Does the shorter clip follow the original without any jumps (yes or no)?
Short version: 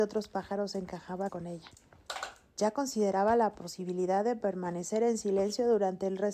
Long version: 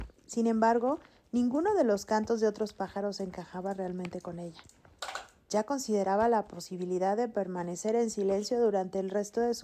no